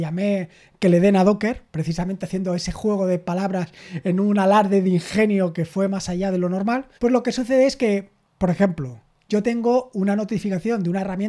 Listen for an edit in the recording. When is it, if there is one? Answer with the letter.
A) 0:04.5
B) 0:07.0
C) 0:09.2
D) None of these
B